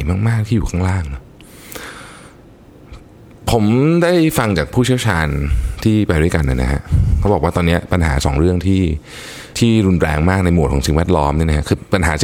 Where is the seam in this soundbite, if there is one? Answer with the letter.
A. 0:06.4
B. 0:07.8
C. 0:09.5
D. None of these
C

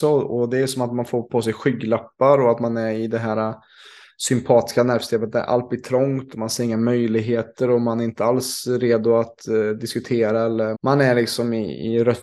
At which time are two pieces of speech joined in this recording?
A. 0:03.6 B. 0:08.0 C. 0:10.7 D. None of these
C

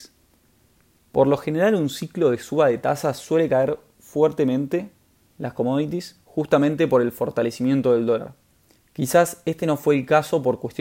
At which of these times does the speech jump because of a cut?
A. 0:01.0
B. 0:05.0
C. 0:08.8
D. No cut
C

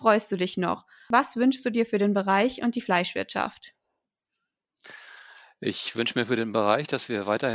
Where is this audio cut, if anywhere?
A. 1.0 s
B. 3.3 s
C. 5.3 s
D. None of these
D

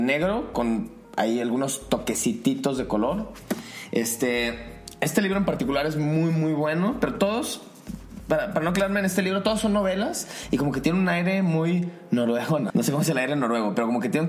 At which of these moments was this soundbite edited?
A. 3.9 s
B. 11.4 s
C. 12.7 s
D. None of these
C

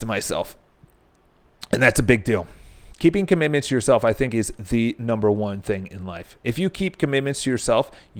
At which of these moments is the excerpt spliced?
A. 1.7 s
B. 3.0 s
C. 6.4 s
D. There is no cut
D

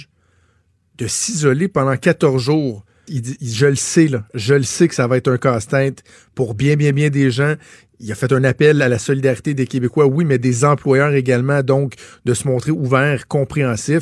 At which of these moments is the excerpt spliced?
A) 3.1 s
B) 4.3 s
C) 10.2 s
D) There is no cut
A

